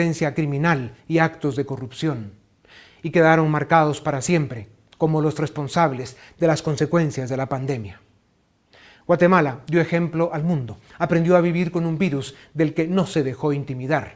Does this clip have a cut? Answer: no; 0 cuts

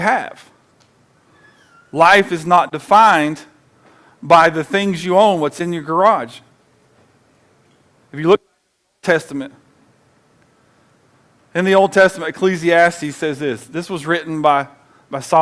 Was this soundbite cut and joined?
no; 0 cuts

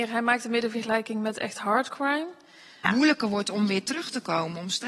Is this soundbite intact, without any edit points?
no; 1 cut; at 2.8 s

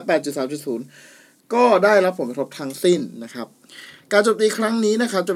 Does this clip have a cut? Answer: no; 0 cuts

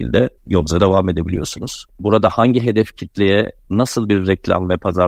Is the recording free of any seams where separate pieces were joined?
no; 1 cut; at 1.9 s

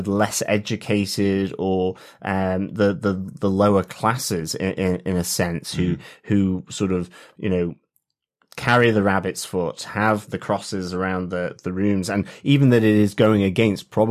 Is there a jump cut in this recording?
yes; 1 cut; at 10.3 s

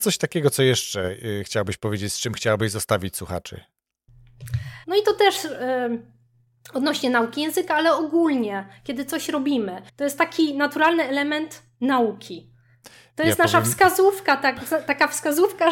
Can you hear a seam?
yes; 2 cuts; at 4.8 s, 9.9 s

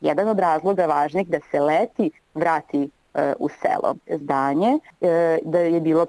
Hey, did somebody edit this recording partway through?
yes; 1 cut; at 4.2 s

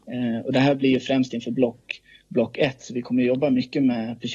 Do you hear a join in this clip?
no; 0 cuts

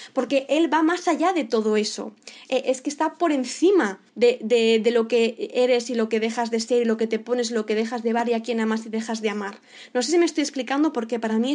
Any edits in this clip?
yes; 1 cut; at 4.1 s

